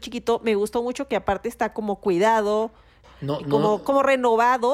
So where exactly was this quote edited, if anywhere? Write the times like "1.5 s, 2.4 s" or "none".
3.0 s